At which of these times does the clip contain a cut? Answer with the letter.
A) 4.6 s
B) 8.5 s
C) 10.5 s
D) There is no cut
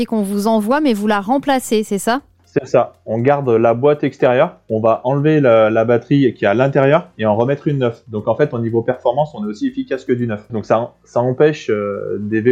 C